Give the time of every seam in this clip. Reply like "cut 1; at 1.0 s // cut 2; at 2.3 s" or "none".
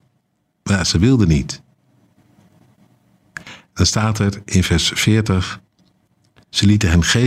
none